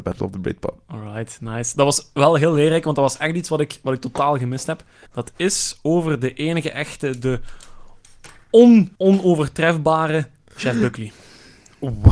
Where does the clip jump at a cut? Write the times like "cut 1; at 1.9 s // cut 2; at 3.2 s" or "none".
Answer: cut 1; at 5.1 s // cut 2; at 8.9 s